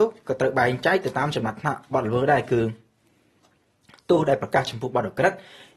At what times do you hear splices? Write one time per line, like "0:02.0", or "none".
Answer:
none